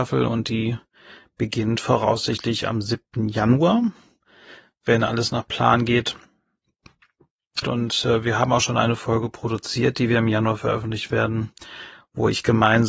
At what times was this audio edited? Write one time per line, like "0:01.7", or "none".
0:07.6